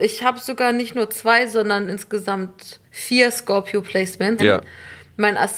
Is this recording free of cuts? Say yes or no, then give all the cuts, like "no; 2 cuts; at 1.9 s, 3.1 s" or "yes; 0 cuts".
no; 2 cuts; at 2.9 s, 4.4 s